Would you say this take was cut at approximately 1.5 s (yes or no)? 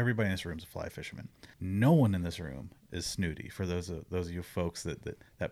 yes